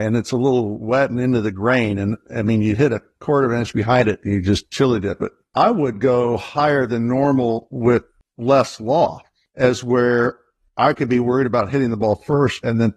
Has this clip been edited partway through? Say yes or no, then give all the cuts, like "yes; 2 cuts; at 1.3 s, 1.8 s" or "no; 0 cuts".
yes; 1 cut; at 9.5 s